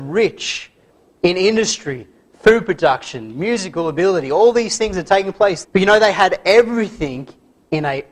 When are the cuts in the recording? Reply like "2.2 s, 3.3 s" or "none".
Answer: 5.6 s